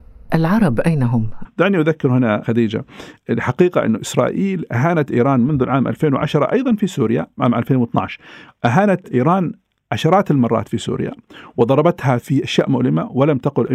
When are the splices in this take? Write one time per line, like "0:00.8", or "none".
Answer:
0:01.4